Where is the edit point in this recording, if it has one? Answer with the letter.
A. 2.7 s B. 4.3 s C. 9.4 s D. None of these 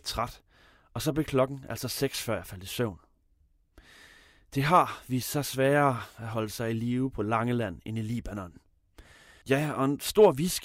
C